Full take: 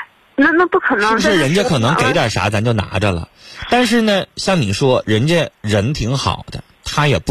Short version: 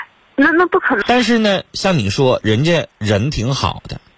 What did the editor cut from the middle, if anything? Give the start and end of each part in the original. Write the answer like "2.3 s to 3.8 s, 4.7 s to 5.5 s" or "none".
1.0 s to 3.6 s